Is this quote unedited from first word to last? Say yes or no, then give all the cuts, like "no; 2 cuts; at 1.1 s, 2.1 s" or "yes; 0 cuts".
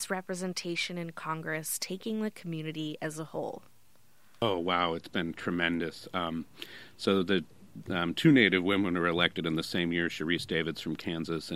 yes; 0 cuts